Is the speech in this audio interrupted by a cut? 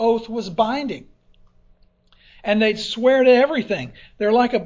no; 0 cuts

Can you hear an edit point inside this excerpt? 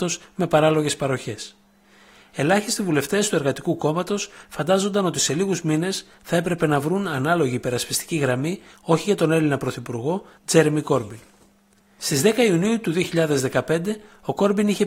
yes; 1 cut; at 10.4 s

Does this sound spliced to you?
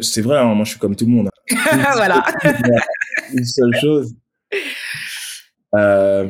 yes; 1 cut; at 1.3 s

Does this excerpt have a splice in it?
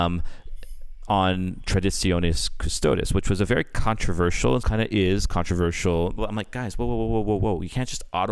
yes; 2 cuts; at 4.6 s, 6.2 s

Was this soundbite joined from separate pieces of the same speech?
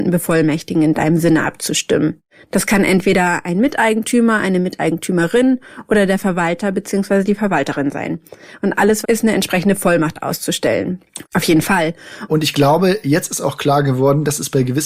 yes; 3 cuts; at 9.0 s, 11.2 s, 12.3 s

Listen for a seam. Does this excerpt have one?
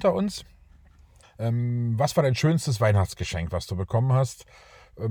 yes; 1 cut; at 1.2 s

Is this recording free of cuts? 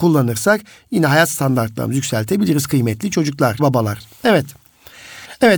no; 1 cut; at 3.6 s

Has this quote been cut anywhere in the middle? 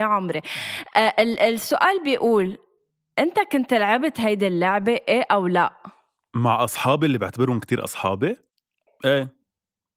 yes; 1 cut; at 8.9 s

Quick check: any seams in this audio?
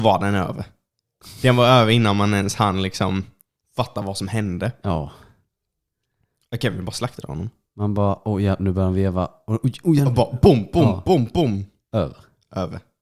no; 0 cuts

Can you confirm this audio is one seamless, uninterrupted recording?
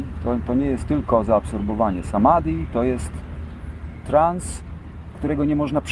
yes; 0 cuts

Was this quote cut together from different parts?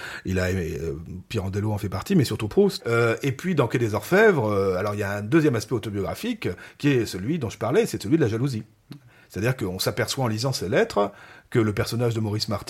yes; 1 cut; at 2.8 s

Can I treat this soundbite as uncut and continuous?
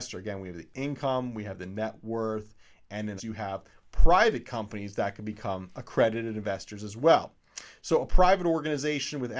no; 1 cut; at 3.2 s

